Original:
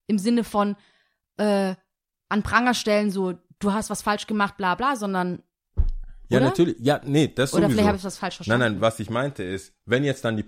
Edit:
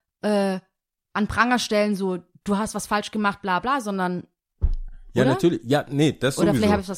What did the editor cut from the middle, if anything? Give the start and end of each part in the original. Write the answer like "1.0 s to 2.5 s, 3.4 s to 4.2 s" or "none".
none